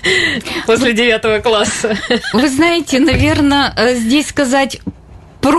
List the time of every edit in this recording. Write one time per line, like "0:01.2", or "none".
none